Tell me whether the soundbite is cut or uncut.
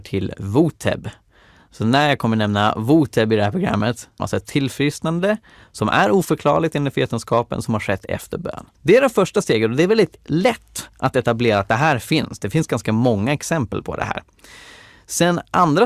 cut